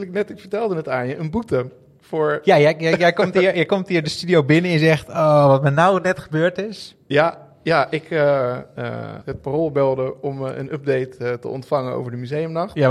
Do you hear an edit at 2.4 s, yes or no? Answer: no